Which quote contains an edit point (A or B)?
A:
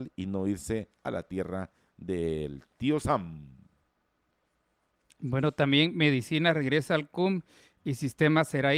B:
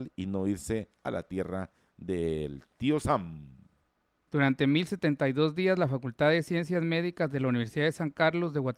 B